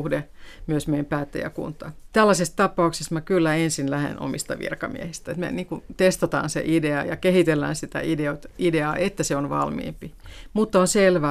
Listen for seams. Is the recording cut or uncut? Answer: cut